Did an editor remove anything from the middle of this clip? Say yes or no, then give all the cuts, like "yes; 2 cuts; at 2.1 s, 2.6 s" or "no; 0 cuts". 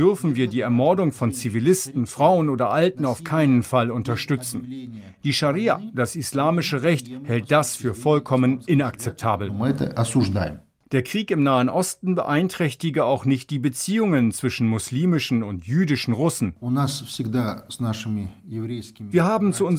no; 0 cuts